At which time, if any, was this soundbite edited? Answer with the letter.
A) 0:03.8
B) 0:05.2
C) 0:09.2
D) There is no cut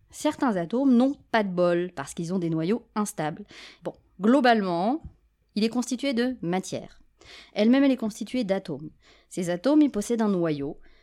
A